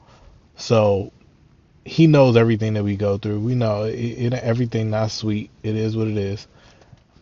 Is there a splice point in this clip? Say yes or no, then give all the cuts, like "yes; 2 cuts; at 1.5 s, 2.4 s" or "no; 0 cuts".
no; 0 cuts